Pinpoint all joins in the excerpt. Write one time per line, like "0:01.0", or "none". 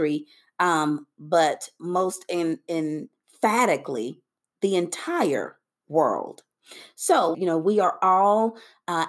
0:07.3